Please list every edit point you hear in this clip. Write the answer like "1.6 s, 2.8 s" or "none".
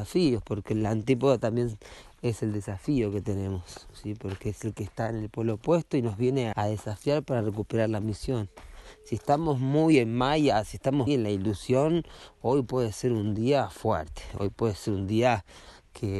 6.5 s, 11.1 s